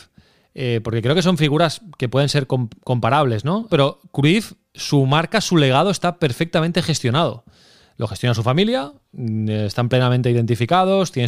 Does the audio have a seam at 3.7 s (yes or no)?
yes